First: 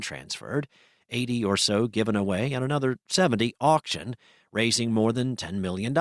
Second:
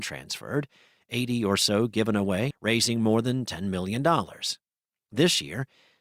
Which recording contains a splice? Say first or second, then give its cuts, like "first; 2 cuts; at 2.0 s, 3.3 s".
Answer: second; 1 cut; at 2.5 s